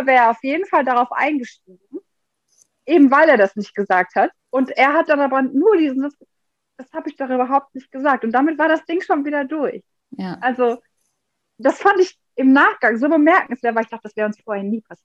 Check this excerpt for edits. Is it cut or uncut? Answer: cut